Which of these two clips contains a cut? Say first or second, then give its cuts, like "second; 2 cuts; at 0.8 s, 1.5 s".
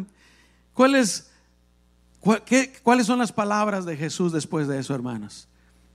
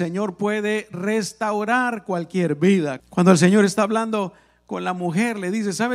second; 1 cut; at 3.0 s